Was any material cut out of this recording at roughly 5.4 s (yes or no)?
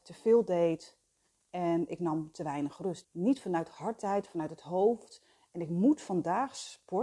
no